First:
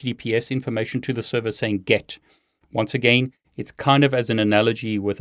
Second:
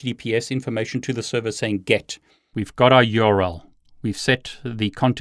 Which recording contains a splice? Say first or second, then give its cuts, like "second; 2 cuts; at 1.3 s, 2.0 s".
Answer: second; 1 cut; at 2.5 s